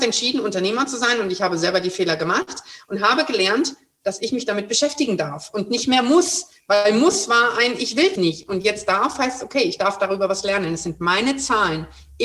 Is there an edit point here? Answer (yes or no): yes